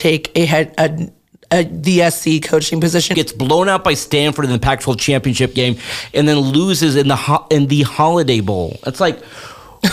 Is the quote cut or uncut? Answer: cut